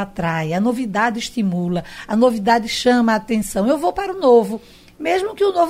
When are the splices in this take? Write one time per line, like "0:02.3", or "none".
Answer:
none